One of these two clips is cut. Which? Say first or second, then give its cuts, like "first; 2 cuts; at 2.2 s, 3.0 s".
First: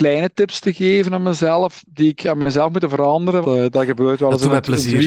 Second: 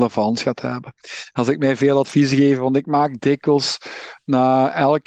first; 1 cut; at 3.4 s